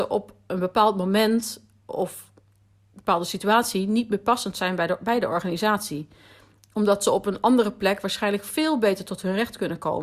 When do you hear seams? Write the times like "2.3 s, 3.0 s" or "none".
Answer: 1.9 s